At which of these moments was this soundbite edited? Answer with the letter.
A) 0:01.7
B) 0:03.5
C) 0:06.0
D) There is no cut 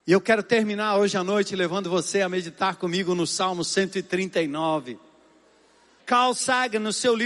C